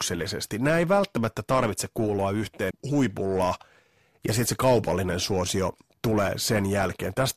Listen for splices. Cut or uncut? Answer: cut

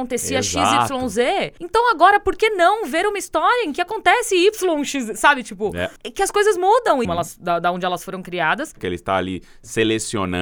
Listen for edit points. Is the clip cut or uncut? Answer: cut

